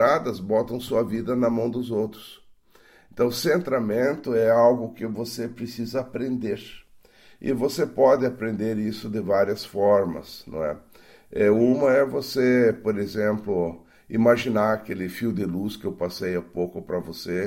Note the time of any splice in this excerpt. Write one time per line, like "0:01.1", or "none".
none